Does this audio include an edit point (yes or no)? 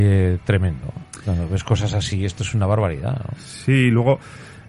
no